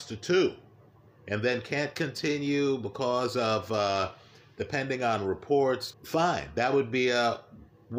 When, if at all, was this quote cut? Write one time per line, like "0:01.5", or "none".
0:05.9